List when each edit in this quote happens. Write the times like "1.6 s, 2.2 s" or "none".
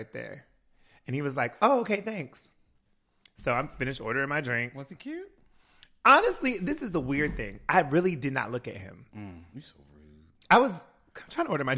none